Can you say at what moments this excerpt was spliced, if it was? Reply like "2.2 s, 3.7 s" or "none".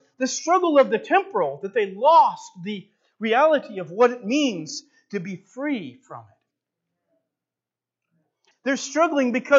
8.5 s